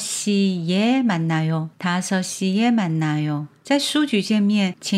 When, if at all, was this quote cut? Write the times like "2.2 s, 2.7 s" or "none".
1.7 s